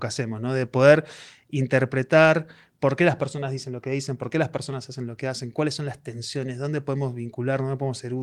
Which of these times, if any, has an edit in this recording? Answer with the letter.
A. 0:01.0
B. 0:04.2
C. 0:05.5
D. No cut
D